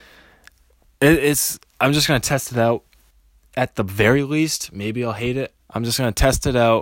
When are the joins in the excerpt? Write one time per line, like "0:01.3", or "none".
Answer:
0:05.6